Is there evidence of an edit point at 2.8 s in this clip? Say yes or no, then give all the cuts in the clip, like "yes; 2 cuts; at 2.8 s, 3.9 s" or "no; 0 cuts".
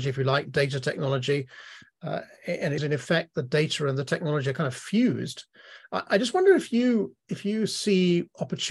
yes; 1 cut; at 2.8 s